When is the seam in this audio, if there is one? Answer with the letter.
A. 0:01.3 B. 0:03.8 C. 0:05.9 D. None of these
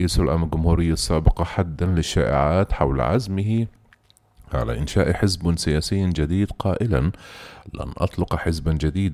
D